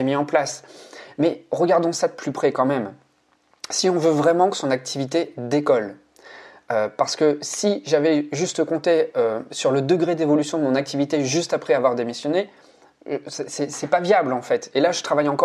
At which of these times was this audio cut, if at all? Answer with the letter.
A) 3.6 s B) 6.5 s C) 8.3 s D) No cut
D